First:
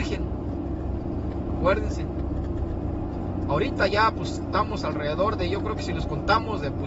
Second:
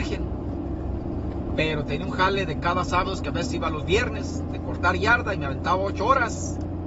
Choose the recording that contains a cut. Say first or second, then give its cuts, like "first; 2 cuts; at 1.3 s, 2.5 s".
second; 1 cut; at 1.6 s